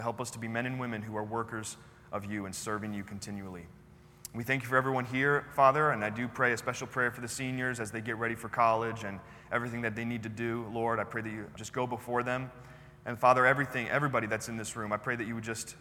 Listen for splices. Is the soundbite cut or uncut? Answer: cut